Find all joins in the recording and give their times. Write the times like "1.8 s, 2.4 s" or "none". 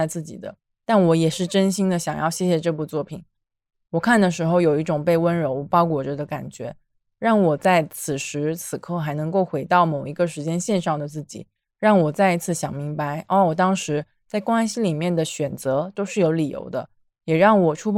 none